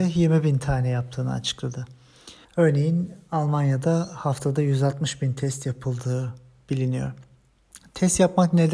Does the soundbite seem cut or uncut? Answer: cut